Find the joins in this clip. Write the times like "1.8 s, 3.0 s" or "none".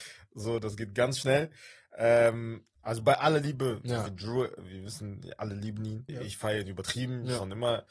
2.8 s, 6.1 s